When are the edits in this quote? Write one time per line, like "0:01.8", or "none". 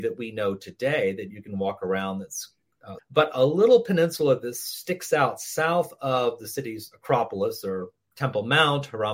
0:03.0